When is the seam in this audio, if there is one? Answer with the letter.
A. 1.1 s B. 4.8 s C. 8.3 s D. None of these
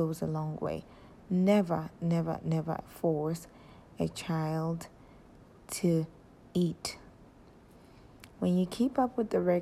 C